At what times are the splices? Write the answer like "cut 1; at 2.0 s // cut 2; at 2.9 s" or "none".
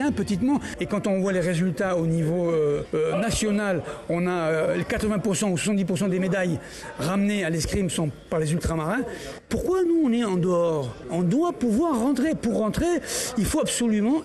none